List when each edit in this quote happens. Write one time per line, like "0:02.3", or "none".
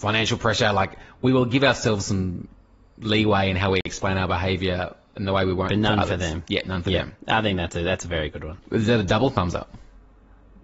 none